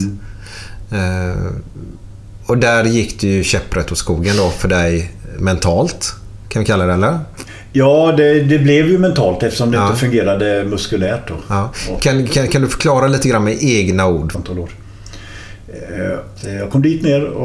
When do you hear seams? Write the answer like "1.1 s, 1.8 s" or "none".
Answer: 14.3 s, 16.4 s